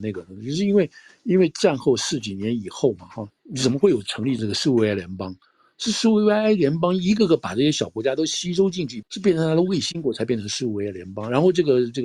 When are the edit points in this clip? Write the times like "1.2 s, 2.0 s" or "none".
3.3 s, 9.0 s